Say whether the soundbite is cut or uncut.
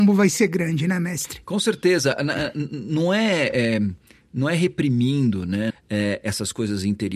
cut